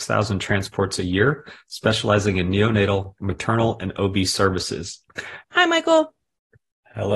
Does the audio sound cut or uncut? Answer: cut